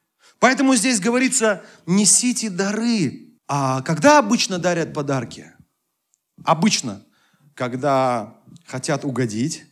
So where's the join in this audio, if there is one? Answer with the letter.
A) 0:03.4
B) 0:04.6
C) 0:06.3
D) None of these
A